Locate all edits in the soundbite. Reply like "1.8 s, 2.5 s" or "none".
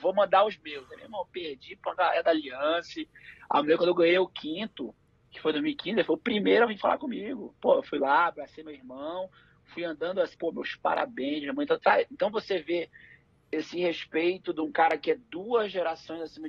10.3 s